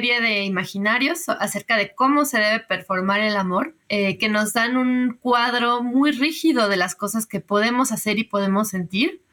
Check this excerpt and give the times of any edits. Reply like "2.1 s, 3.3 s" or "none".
3.8 s